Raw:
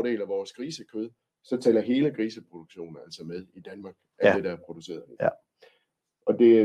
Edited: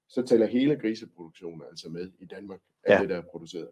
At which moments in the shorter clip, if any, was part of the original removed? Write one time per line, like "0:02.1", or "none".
none